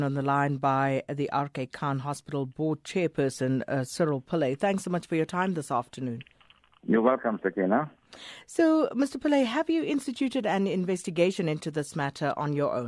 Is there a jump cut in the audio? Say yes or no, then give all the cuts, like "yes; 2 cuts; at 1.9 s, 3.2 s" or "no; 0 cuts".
no; 0 cuts